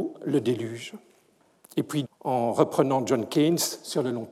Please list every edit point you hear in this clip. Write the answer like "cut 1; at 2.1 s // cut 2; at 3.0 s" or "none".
cut 1; at 2.0 s